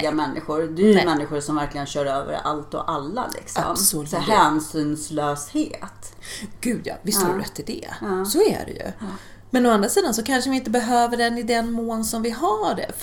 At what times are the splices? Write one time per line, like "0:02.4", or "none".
none